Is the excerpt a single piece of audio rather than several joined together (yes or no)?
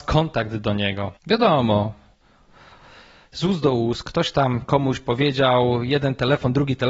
no